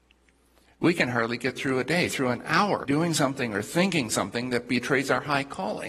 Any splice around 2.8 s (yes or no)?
yes